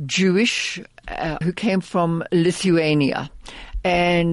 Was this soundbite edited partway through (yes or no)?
yes